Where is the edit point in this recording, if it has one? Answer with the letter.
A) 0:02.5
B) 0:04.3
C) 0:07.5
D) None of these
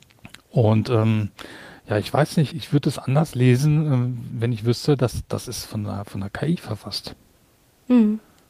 A